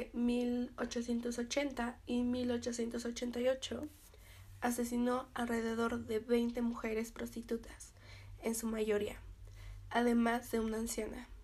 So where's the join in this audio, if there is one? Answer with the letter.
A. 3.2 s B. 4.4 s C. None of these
C